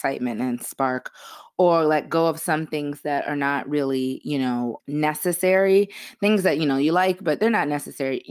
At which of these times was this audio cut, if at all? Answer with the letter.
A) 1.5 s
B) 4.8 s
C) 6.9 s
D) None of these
B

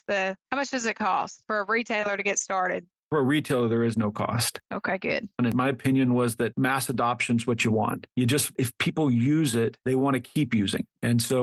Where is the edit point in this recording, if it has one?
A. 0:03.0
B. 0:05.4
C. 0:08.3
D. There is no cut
B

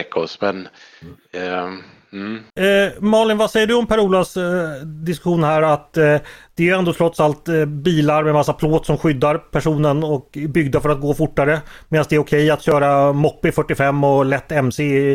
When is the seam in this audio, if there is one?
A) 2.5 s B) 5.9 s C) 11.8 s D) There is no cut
A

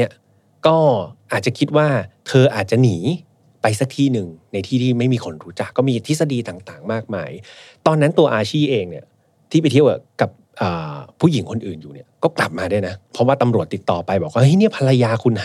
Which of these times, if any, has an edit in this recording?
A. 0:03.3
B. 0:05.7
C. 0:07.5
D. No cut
B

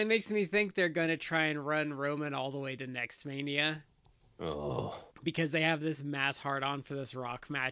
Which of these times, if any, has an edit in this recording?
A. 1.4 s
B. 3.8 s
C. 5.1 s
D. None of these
C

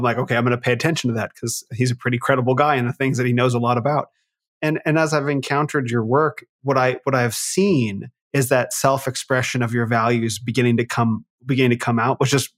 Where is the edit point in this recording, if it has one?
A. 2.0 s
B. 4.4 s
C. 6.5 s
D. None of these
C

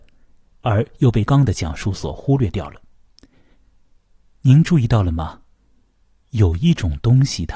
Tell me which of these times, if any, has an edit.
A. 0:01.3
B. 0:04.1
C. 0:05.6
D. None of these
A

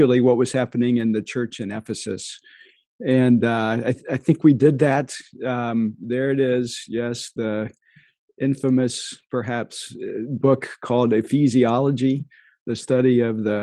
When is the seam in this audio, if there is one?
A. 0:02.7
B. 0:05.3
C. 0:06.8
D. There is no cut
D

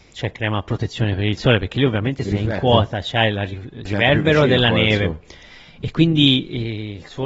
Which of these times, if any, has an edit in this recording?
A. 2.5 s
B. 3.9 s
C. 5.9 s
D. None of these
B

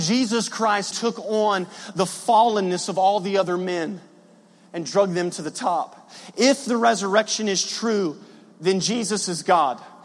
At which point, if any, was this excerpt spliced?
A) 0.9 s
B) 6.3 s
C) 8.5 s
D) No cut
A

